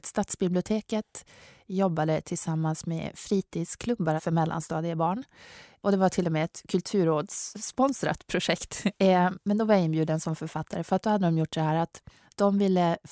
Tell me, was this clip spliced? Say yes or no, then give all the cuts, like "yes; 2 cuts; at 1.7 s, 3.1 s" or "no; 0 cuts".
yes; 1 cut; at 4.2 s